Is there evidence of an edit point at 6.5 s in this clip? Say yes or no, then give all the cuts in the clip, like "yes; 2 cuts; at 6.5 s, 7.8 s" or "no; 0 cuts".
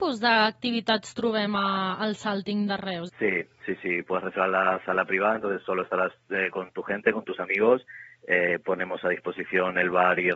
no; 1 cut; at 3.1 s